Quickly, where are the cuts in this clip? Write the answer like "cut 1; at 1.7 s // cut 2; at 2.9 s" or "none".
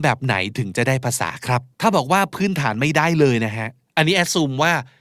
cut 1; at 1.7 s